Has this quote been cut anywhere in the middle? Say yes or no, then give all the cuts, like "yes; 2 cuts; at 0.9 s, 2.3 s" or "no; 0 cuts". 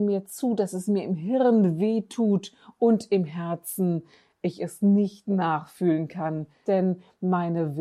yes; 1 cut; at 6.6 s